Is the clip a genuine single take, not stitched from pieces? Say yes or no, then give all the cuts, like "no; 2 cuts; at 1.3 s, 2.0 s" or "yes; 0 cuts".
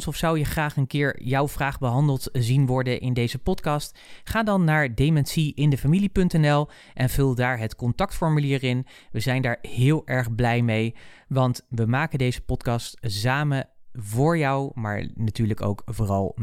yes; 0 cuts